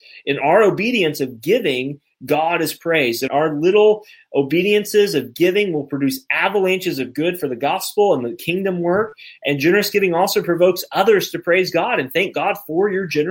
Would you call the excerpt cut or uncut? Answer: cut